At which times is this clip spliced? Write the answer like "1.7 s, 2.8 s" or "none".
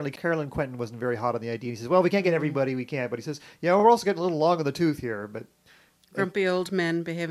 none

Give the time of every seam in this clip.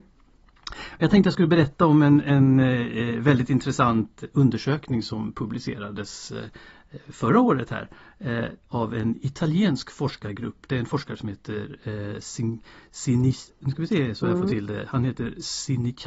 none

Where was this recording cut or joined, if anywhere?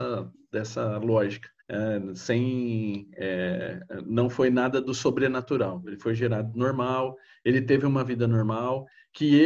1.6 s

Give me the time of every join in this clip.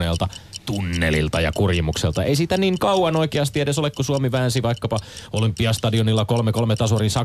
none

